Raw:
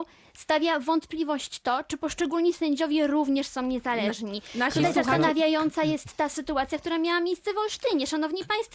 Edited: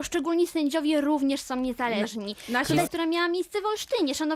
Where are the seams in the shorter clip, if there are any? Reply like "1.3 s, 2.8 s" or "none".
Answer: 2.9 s